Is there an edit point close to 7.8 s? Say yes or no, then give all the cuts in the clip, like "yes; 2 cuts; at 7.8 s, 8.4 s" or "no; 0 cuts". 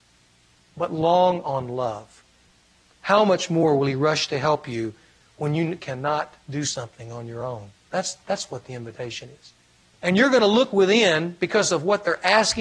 no; 1 cut; at 9.9 s